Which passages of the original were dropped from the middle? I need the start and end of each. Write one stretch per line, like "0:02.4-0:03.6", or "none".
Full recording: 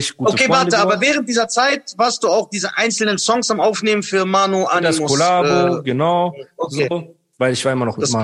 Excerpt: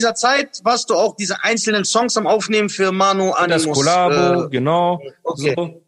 none